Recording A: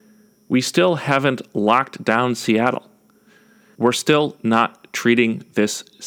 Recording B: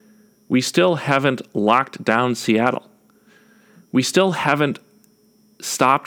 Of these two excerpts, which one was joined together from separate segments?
A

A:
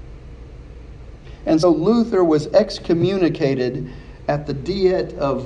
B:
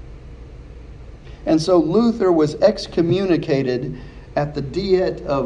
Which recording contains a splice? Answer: A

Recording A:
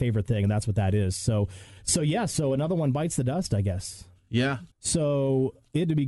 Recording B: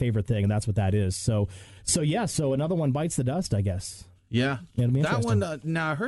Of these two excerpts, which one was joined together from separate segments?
A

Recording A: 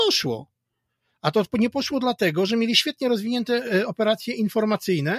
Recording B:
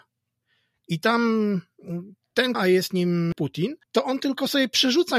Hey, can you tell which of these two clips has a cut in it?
B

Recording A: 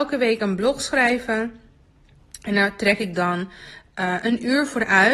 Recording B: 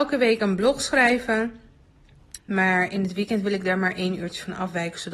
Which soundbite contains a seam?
B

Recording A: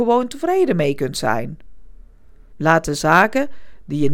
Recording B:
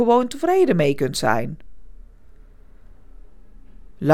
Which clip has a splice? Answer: A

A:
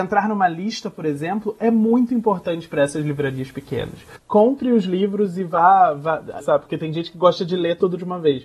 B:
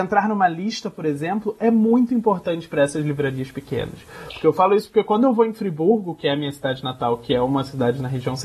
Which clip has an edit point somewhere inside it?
A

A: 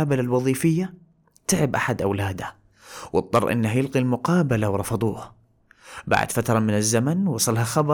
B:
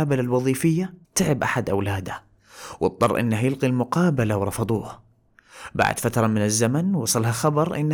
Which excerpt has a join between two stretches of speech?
B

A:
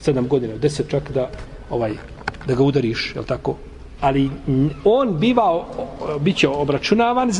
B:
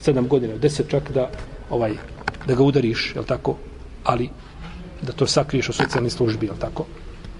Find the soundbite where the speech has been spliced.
A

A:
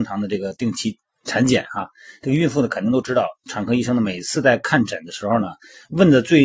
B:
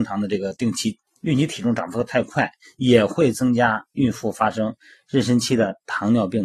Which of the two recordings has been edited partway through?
B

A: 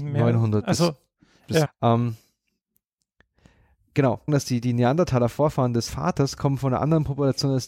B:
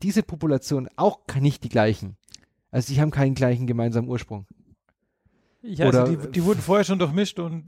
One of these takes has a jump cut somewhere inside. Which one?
A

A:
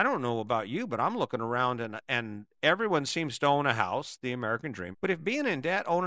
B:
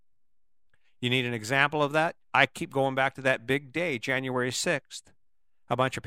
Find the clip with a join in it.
A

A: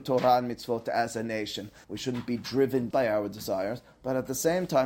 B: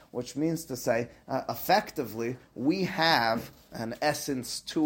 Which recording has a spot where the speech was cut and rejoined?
A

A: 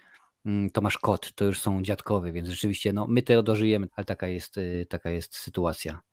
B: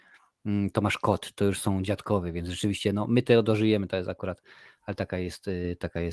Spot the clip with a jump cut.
A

